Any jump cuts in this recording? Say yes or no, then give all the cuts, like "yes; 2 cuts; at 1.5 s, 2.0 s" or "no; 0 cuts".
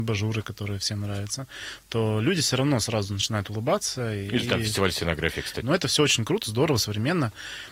yes; 1 cut; at 5.6 s